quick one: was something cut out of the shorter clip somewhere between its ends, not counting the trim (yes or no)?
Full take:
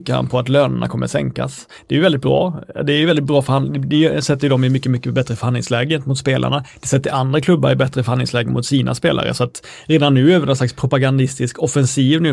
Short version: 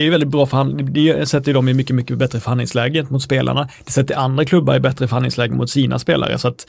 no